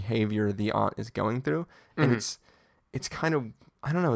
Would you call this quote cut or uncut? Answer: uncut